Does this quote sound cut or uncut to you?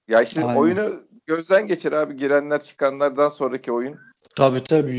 uncut